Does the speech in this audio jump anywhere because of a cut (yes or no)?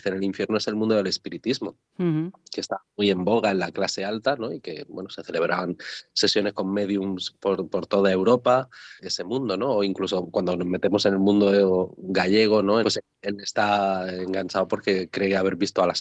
yes